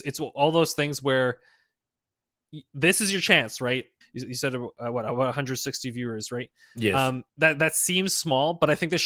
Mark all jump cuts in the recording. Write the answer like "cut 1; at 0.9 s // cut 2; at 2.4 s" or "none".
cut 1; at 4.0 s // cut 2; at 7.3 s